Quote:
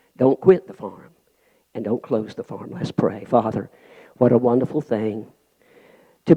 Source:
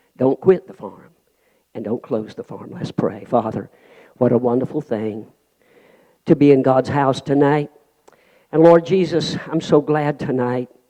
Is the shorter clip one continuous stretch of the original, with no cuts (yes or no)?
yes